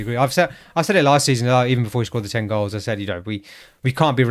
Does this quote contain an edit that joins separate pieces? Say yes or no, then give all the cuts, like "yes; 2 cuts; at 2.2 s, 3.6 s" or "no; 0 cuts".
no; 0 cuts